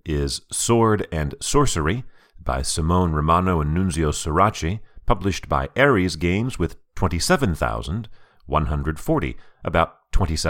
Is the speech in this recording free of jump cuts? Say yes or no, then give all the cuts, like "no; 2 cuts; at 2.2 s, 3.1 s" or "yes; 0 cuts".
yes; 0 cuts